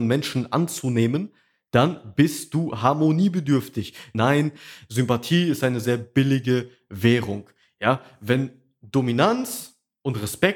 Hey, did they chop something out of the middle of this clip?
yes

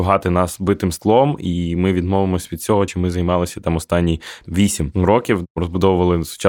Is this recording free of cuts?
yes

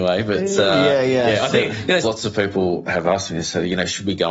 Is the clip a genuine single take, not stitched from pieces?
no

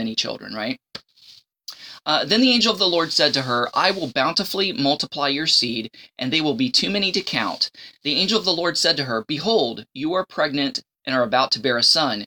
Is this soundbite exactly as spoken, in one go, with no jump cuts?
yes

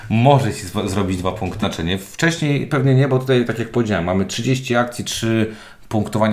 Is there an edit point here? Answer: yes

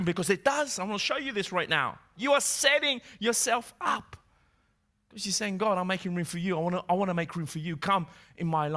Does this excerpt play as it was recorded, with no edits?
no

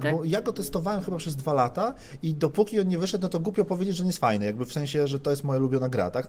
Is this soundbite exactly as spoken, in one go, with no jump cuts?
yes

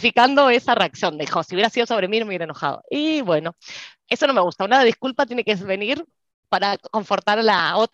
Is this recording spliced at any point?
no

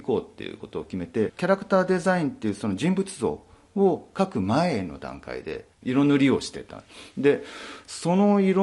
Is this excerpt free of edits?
no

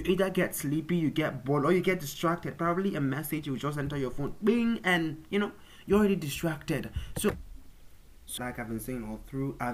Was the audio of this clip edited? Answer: yes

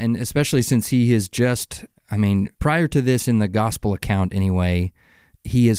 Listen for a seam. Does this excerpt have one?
yes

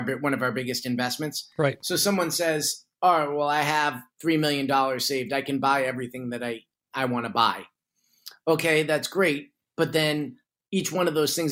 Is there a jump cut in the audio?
no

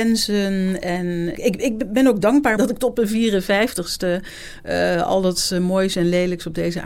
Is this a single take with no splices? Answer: no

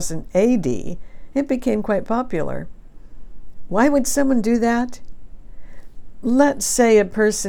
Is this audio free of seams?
yes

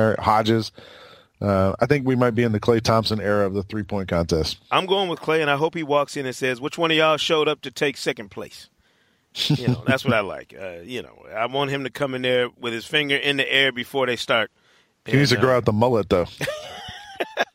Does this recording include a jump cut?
no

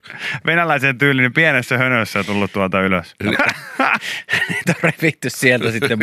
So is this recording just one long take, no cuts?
no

